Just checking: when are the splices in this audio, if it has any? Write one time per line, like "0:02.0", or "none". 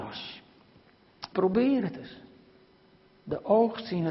0:01.3